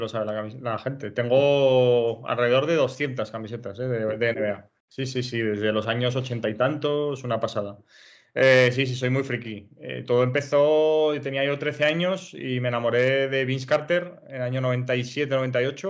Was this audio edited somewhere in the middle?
yes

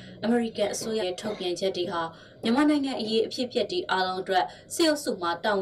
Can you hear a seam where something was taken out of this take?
yes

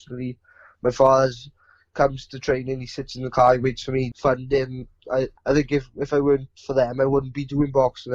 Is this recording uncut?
no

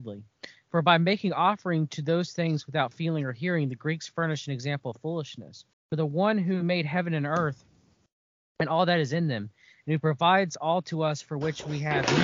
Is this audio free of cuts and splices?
no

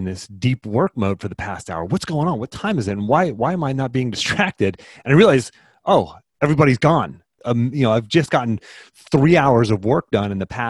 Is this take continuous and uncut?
yes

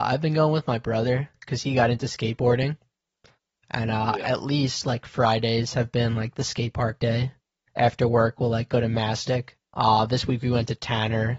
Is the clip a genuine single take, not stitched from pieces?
no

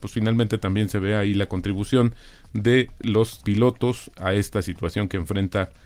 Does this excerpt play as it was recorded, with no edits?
no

